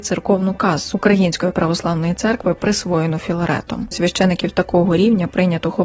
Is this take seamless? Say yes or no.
no